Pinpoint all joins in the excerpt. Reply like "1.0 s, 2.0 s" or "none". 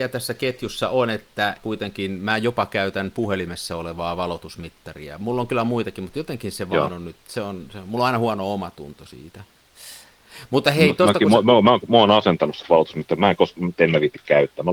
1.6 s